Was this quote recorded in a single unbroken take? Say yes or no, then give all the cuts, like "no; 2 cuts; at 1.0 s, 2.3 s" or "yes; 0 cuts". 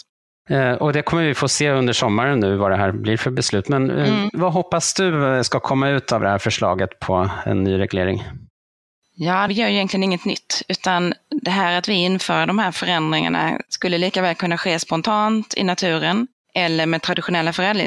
no; 1 cut; at 9.5 s